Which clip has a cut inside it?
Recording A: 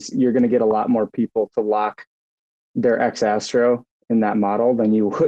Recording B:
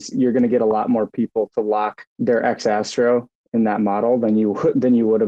B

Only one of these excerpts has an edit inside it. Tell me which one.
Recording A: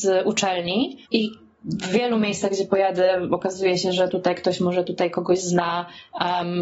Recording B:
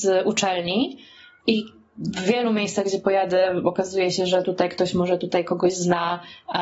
A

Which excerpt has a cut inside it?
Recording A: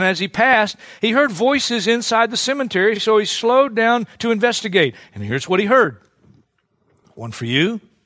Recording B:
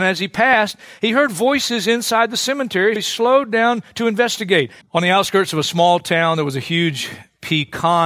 B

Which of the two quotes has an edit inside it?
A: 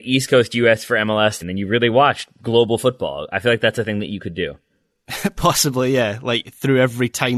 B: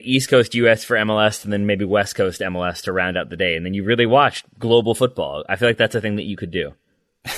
A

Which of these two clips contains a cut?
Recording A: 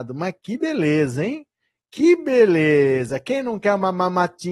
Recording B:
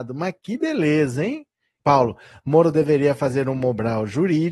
B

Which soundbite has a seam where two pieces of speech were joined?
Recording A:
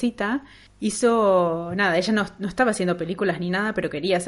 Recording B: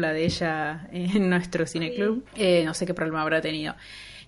B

